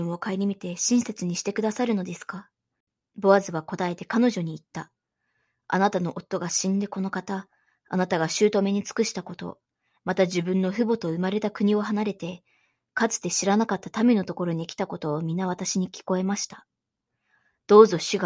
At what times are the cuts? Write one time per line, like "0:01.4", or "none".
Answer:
none